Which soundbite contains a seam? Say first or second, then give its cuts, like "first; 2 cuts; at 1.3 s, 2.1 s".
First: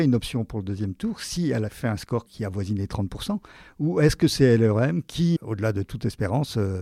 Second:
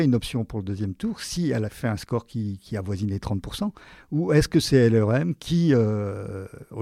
first; 2 cuts; at 2.3 s, 5.4 s